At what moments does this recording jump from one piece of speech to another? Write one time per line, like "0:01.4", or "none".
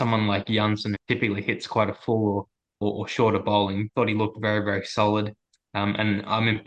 0:01.0
0:02.8
0:03.9